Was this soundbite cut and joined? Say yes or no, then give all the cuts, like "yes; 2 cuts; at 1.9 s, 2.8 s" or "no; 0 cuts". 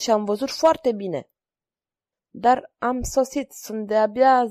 yes; 1 cut; at 2.1 s